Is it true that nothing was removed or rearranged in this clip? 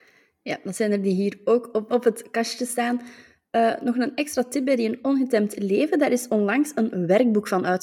no; 1 cut; at 1.9 s

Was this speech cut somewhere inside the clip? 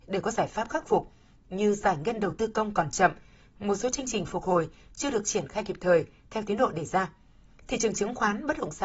no; 0 cuts

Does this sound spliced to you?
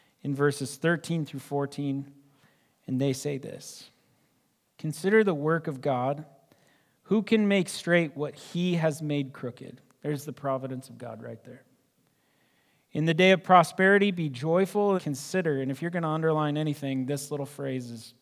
yes; 1 cut; at 15.0 s

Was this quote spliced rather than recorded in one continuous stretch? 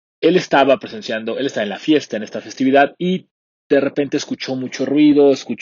no; 0 cuts

